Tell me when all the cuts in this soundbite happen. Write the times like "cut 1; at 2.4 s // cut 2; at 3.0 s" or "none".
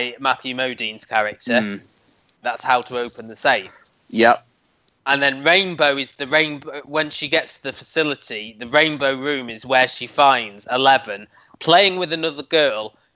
cut 1; at 2.4 s